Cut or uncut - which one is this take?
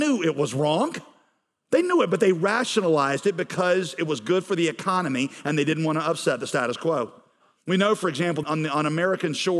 cut